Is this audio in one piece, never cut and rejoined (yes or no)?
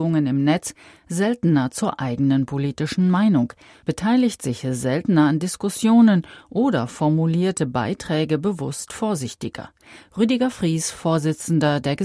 yes